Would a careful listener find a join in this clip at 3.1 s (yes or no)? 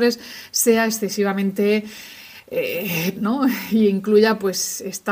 yes